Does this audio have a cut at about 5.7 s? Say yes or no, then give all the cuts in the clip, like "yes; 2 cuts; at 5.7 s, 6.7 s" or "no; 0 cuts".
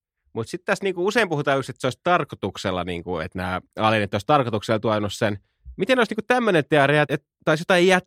no; 1 cut; at 7.0 s